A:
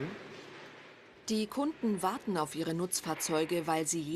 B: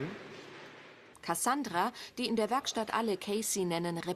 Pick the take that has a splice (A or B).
B